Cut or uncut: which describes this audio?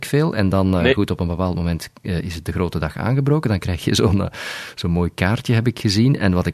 uncut